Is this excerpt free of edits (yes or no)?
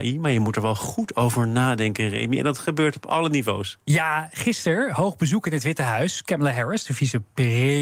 yes